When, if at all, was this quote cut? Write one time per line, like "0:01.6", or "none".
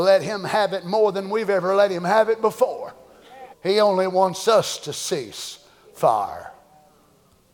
0:03.5